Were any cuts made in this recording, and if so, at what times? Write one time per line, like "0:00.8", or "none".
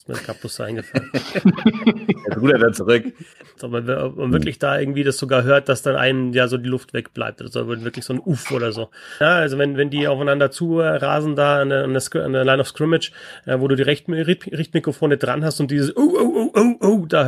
0:03.6
0:09.2